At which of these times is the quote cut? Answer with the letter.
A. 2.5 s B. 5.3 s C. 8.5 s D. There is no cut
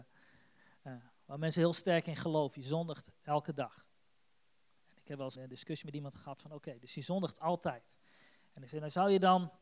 B